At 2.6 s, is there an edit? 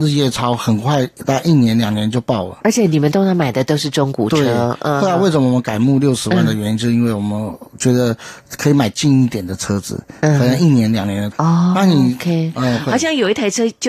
no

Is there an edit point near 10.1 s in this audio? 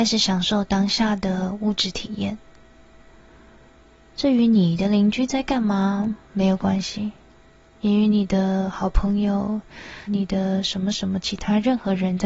yes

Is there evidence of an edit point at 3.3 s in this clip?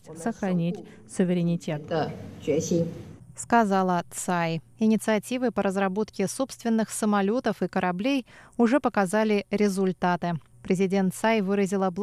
no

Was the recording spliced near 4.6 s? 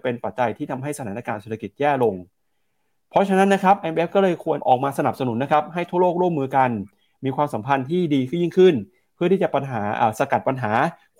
yes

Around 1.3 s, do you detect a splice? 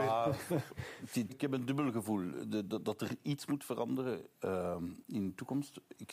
yes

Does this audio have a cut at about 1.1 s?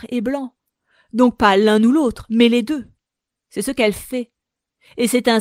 no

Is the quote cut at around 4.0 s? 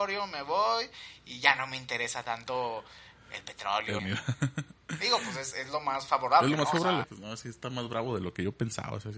yes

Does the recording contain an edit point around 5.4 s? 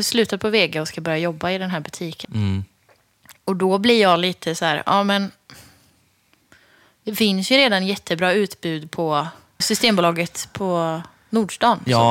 no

